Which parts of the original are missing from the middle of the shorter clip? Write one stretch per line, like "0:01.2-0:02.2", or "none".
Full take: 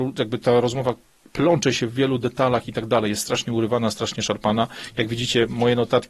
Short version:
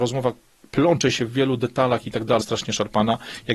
0:03.0-0:03.9

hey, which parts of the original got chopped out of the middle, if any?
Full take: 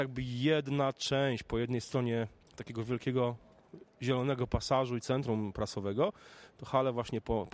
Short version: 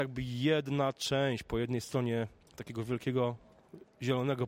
none

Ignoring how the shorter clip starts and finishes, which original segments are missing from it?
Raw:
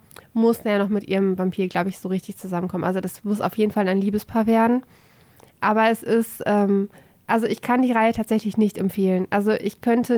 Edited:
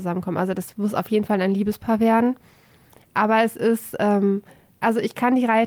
none

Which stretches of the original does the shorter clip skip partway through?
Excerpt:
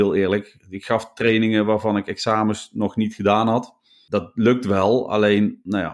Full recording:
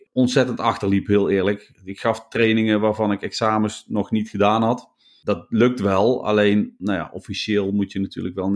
none

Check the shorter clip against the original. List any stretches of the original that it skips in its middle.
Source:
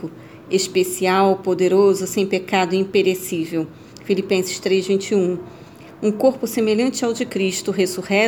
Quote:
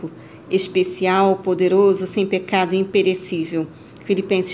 none

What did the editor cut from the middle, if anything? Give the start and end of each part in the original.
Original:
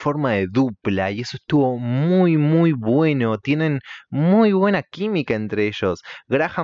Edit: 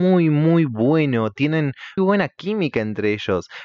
0:04.0-0:04.5

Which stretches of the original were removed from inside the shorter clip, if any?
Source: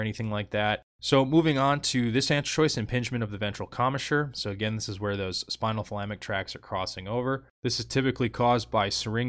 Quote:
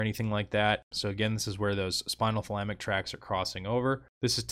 0:00.9-0:04.3

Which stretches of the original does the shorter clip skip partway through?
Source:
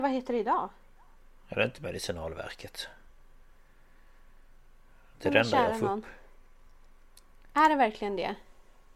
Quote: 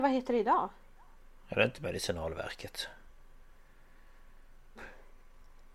0:04.8-0:06.0

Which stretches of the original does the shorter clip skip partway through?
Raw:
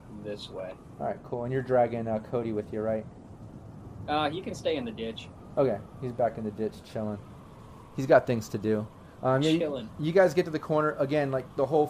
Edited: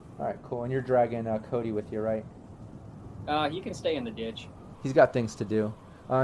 0:05.6-0:07.9

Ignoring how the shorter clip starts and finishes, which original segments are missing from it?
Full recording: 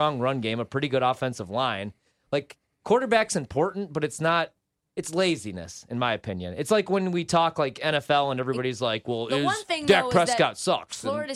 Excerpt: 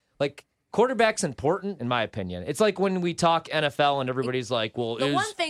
0:03.9-0:05.9
0:07.5-0:07.7

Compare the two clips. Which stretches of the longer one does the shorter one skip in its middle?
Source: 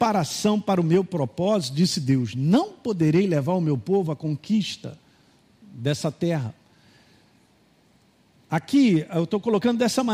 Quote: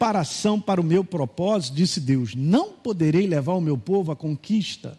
none

